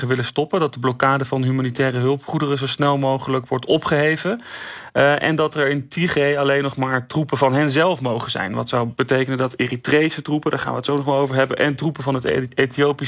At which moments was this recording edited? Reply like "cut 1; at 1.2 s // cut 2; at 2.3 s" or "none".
none